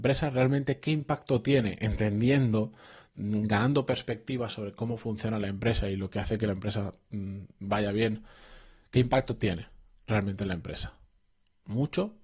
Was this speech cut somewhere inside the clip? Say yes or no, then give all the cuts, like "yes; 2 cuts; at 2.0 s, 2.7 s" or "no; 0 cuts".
no; 0 cuts